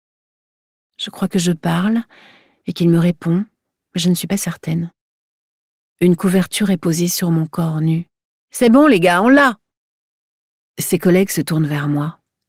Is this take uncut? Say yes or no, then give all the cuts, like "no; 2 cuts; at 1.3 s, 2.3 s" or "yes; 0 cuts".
no; 1 cut; at 8.4 s